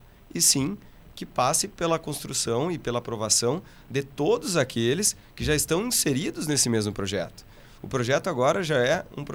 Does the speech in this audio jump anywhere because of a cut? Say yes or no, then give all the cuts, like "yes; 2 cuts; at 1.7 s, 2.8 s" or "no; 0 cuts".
yes; 1 cut; at 7.8 s